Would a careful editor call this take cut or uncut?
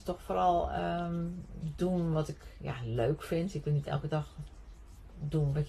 uncut